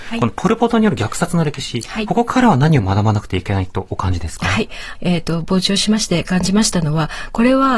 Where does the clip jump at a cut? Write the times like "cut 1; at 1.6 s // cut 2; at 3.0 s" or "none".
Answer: cut 1; at 2.1 s // cut 2; at 4.9 s